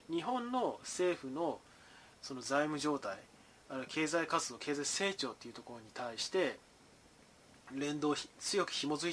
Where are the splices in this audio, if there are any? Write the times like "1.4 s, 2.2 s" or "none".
none